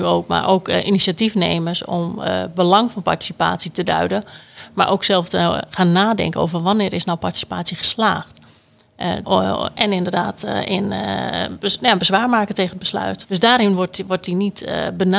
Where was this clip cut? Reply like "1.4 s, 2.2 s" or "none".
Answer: 9.2 s, 13.2 s